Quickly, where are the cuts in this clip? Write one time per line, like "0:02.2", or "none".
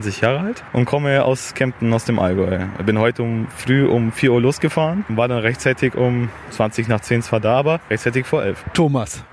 none